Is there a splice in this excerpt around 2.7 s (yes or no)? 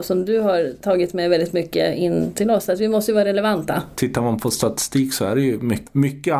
no